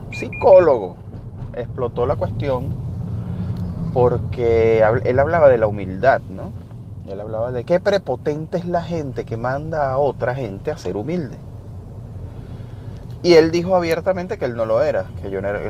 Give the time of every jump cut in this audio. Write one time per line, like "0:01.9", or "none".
0:07.6